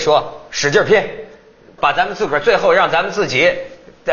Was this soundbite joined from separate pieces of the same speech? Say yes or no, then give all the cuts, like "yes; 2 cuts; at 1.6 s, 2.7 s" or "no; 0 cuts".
yes; 1 cut; at 1.8 s